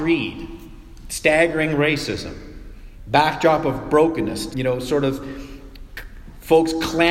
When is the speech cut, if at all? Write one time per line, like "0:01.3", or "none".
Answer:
0:04.5